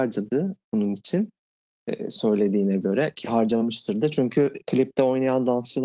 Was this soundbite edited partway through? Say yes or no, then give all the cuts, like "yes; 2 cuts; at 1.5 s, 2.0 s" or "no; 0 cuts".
no; 0 cuts